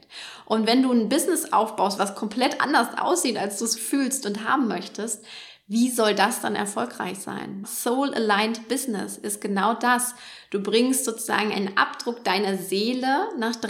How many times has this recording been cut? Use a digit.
3